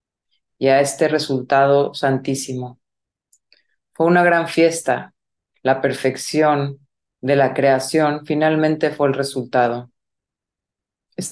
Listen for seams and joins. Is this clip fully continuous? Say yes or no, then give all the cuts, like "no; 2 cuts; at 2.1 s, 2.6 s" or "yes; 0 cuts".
no; 1 cut; at 5.5 s